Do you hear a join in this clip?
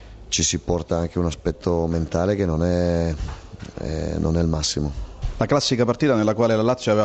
no; 0 cuts

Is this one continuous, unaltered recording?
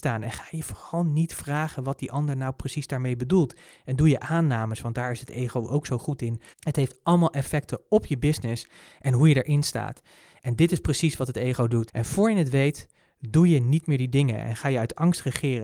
no; 2 cuts; at 6.5 s, 11.9 s

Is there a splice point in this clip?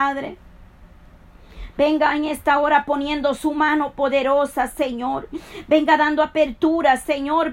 no; 0 cuts

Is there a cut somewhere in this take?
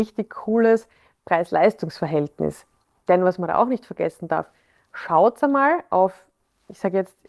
no; 0 cuts

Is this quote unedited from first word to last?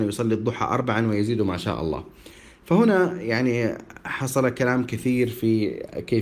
yes; 0 cuts

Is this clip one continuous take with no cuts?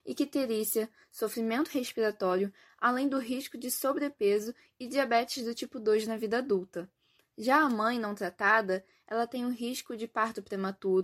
yes; 0 cuts

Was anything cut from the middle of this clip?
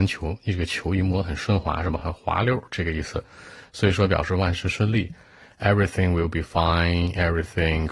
no; 0 cuts

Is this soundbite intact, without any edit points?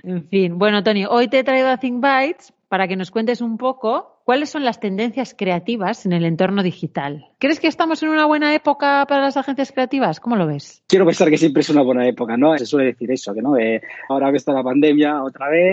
no; 3 cuts; at 7.4 s, 12.6 s, 14.1 s

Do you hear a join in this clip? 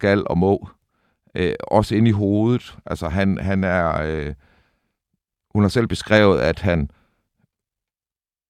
no; 0 cuts

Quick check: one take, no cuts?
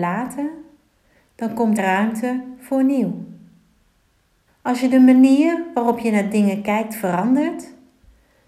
no; 2 cuts; at 1.8 s, 4.5 s

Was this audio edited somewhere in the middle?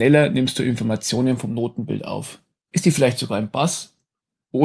yes; 1 cut; at 2.7 s

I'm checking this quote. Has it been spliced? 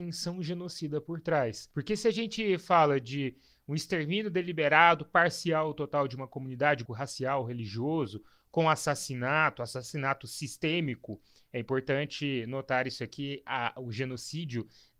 yes; 1 cut; at 6.9 s

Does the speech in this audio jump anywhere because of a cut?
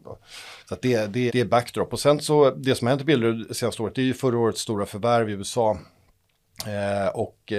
yes; 1 cut; at 1.3 s

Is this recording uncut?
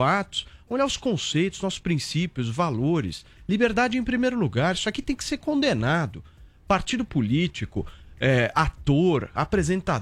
yes; 0 cuts

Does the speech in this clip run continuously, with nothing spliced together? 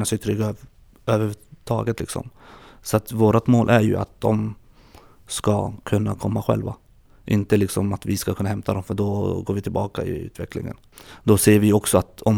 yes; 0 cuts

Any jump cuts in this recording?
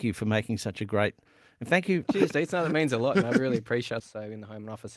yes; 2 cuts; at 2.0 s, 4.0 s

